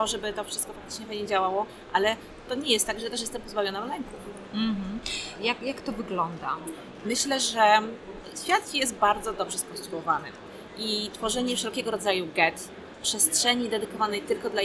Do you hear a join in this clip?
yes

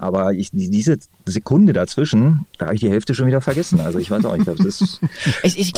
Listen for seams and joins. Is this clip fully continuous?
yes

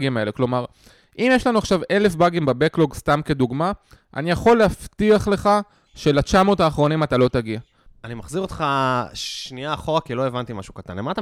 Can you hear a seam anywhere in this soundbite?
yes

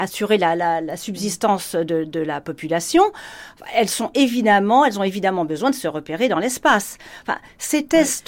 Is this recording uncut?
yes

